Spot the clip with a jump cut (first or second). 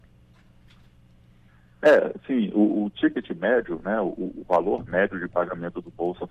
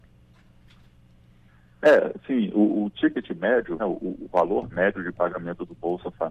second